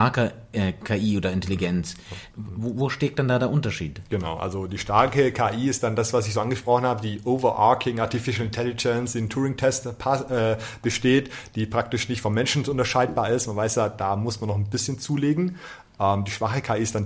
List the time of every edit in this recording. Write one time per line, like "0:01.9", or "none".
0:02.3